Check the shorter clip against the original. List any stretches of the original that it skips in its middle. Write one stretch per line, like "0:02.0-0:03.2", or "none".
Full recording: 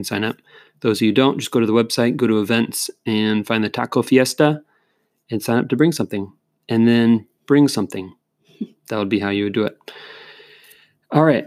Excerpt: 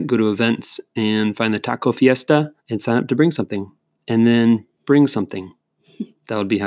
0:04.7-0:05.2